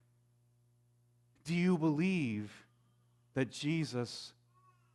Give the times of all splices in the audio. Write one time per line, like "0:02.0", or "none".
0:01.4